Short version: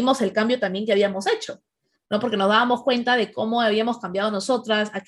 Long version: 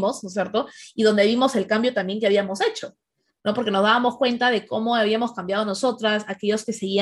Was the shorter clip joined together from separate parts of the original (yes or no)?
no